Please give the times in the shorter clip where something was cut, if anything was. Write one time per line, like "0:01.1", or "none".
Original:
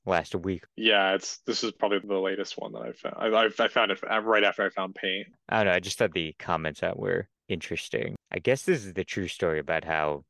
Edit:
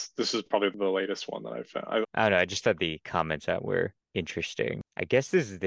0:02.0